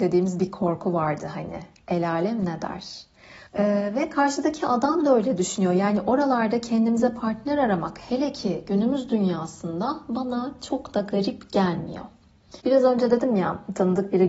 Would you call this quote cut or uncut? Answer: cut